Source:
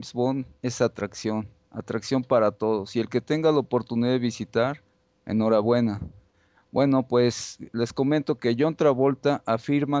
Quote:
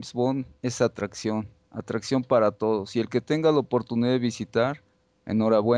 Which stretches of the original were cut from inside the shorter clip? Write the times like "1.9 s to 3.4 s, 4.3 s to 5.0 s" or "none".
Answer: none